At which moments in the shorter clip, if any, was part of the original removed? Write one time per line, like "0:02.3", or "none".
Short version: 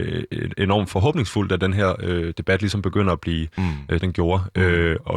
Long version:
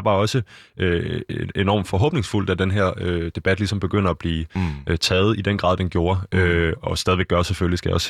0:04.0